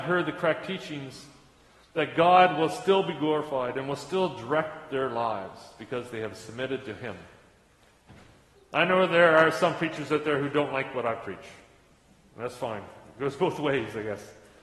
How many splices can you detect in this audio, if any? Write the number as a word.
one